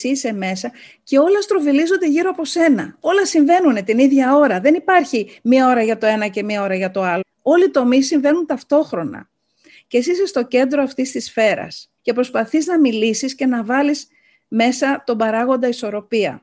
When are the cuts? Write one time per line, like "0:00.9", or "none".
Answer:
0:07.2
0:12.0

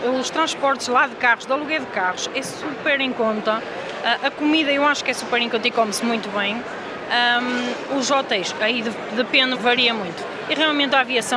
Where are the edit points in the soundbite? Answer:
0:09.5

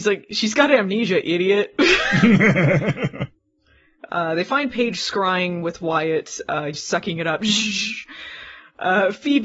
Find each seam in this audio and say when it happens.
0:06.7

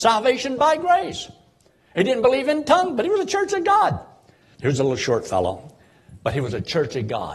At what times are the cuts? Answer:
0:04.5

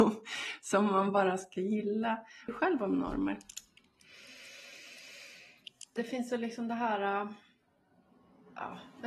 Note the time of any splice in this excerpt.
0:02.5
0:06.0

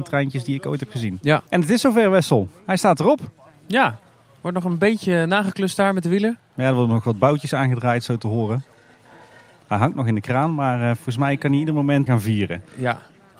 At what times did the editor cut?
0:01.5
0:12.1

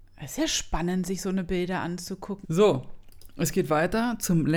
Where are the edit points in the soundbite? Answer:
0:02.4

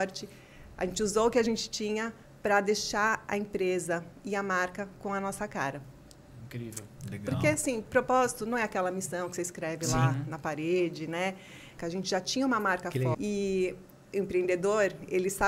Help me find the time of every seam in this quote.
0:07.0
0:11.8
0:13.1

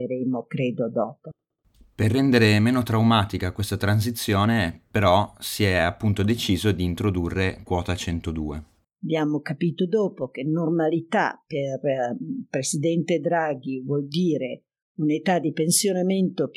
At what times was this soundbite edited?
0:08.8

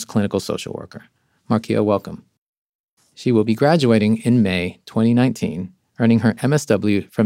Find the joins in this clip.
0:03.0

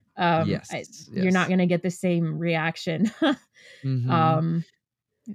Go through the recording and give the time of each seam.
none

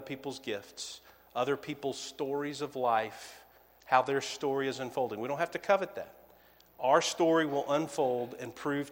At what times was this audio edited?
none

